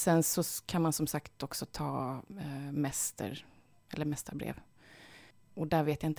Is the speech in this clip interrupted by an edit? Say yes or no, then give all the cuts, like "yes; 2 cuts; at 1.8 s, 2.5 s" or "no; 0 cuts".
no; 0 cuts